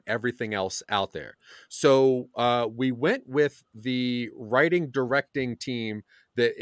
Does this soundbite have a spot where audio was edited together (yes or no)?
no